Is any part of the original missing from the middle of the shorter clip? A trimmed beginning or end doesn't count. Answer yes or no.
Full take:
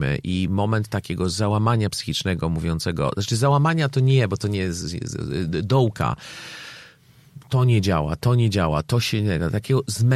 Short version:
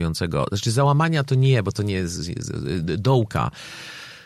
no